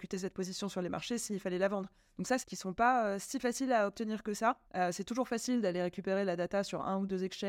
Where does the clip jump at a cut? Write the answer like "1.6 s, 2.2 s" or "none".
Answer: 2.4 s, 4.6 s